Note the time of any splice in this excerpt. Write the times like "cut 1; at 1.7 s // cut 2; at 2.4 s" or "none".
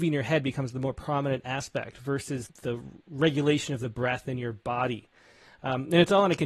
cut 1; at 2.5 s